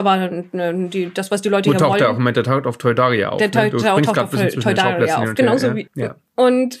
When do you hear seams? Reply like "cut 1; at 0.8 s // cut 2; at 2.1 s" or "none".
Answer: cut 1; at 5.9 s